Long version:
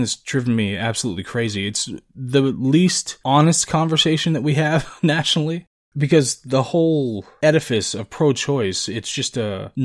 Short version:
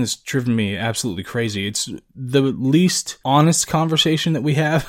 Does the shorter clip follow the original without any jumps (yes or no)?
yes